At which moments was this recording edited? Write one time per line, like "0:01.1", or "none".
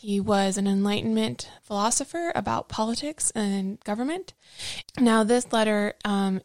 0:01.6
0:04.8